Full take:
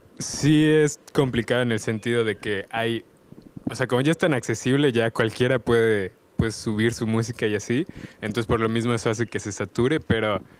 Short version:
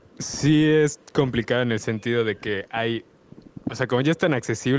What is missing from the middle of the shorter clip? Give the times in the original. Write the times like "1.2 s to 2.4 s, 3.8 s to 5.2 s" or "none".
none